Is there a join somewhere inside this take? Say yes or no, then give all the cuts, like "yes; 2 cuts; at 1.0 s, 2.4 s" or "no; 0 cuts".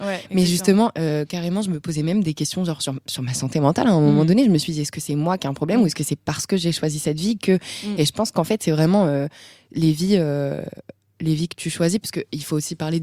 no; 0 cuts